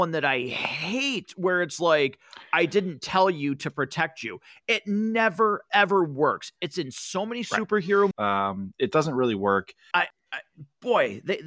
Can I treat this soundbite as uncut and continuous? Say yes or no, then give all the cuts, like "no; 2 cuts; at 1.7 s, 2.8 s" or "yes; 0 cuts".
no; 2 cuts; at 8.1 s, 9.9 s